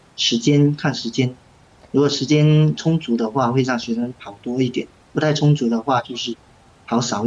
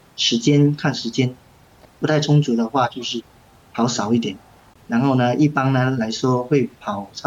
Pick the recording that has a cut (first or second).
second